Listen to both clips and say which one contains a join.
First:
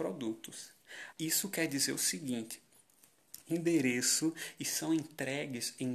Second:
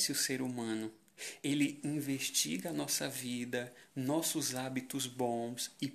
first; 2 cuts; at 1.1 s, 3.4 s

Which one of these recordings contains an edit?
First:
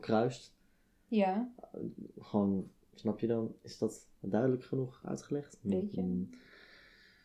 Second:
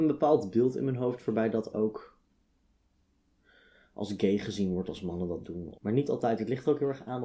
second; 1 cut; at 5.7 s

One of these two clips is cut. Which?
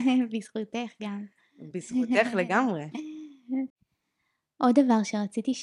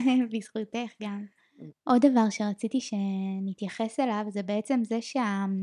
second; 1 cut; at 1.7 s

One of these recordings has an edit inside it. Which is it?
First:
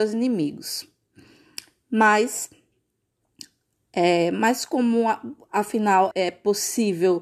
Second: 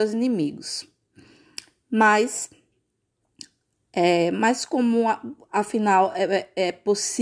first; 1 cut; at 6.1 s

